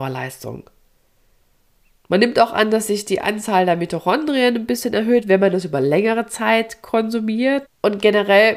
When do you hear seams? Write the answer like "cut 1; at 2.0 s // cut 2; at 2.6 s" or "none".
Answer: cut 1; at 7.6 s